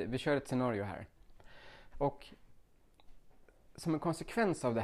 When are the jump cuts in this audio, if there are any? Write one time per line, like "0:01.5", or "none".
0:01.9